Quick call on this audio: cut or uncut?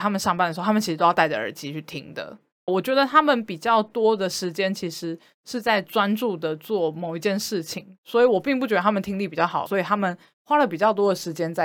cut